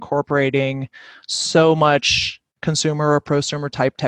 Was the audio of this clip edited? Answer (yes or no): yes